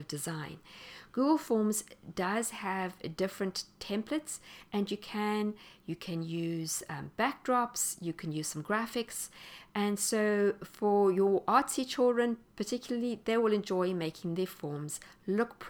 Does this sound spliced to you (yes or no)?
no